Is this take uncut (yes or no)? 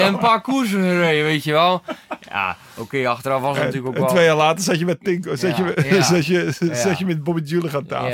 yes